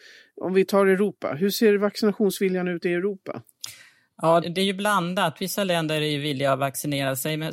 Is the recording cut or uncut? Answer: cut